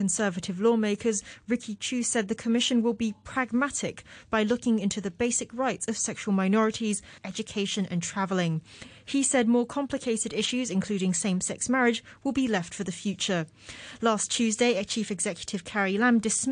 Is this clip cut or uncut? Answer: cut